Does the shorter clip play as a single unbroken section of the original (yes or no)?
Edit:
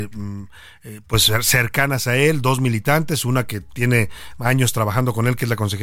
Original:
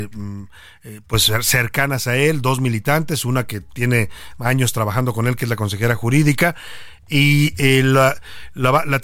yes